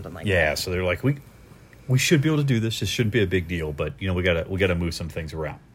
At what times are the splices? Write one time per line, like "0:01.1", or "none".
none